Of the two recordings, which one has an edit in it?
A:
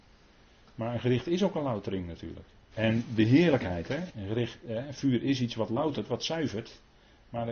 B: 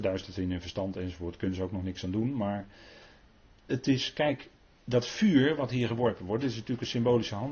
A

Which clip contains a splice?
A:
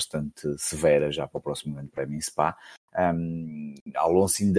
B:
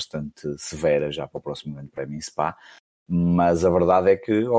A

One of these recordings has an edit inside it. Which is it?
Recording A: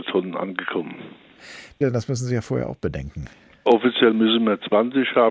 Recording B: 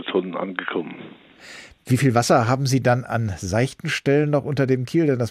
A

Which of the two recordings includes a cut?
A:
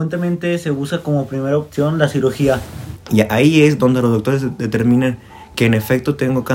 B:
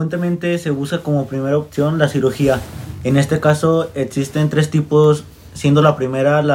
A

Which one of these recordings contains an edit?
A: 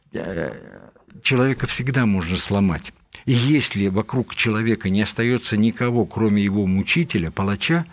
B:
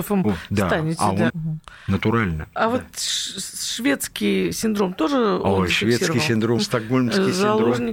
B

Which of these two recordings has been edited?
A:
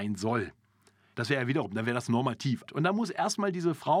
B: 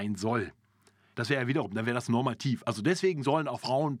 A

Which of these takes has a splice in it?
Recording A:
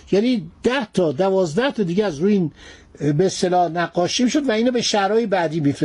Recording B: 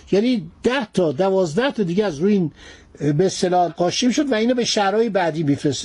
B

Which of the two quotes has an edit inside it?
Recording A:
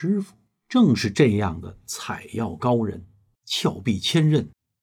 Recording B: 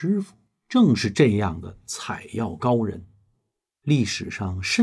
A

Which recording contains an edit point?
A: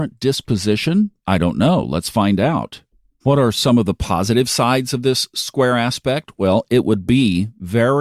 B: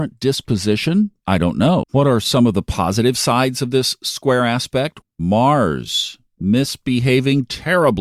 B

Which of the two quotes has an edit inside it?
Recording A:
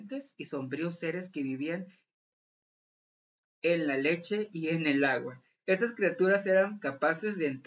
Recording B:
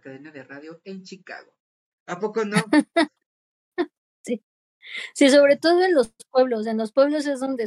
B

